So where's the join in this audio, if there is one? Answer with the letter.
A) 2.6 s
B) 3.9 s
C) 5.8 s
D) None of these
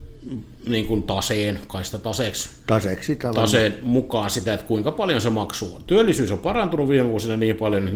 D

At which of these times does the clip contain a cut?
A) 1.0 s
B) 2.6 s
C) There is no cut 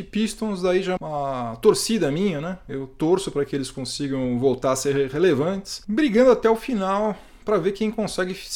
A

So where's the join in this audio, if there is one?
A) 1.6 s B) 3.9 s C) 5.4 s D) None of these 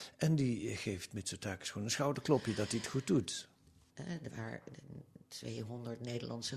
B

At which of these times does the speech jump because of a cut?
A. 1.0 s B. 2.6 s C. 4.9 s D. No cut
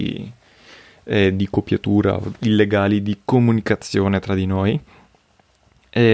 D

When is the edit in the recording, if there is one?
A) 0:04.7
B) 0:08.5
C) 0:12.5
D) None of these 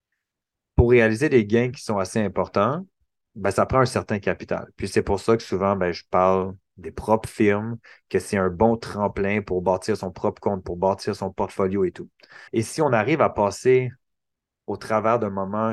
C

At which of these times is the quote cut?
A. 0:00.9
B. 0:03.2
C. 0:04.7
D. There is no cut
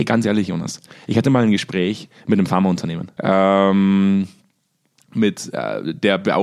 B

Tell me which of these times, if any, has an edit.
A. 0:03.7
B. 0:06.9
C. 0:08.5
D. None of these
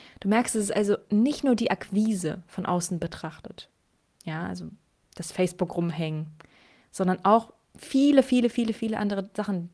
D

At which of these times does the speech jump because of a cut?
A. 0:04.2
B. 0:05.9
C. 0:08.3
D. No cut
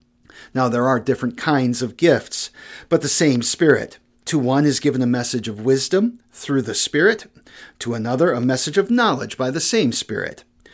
A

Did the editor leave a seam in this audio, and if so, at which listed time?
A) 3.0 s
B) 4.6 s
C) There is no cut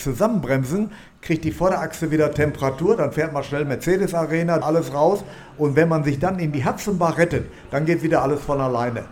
B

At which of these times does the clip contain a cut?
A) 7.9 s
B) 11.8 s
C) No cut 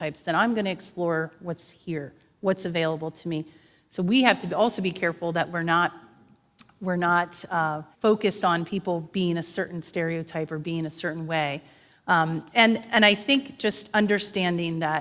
A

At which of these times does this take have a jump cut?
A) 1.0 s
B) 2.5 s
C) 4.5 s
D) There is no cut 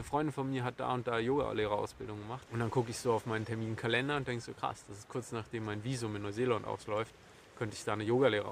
B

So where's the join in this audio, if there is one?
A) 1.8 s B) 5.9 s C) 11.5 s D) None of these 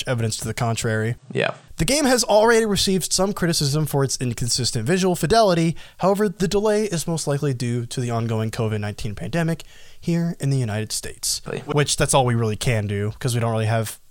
C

